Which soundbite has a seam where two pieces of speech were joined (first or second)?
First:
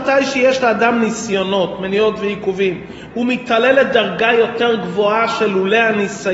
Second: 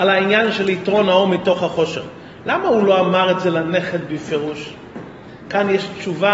first